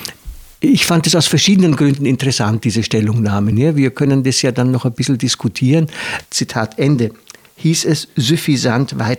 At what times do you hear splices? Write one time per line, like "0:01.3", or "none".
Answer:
0:03.5
0:06.3